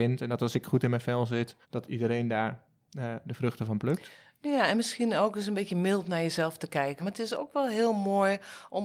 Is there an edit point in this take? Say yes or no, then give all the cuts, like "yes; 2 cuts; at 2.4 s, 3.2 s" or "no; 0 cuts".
yes; 2 cuts; at 1.6 s, 7.0 s